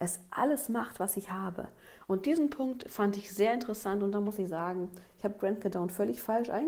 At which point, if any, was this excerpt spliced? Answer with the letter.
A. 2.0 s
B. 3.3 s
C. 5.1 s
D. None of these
D